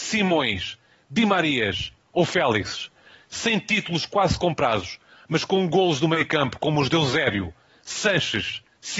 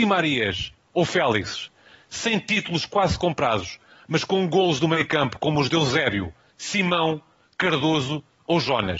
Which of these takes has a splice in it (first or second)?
second